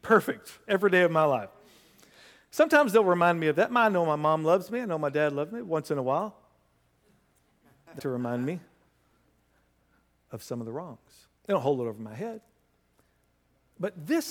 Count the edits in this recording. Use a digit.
2